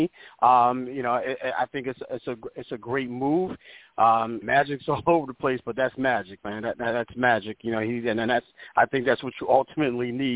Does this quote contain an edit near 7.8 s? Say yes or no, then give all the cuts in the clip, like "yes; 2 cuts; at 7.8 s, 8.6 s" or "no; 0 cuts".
no; 1 cut; at 4.4 s